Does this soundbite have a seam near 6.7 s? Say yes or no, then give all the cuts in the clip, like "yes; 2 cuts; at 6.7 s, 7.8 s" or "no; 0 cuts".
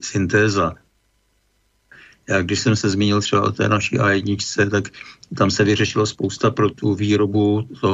yes; 1 cut; at 6.7 s